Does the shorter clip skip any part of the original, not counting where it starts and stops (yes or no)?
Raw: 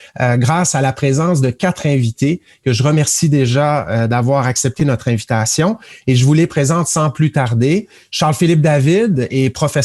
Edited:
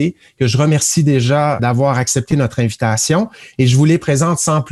yes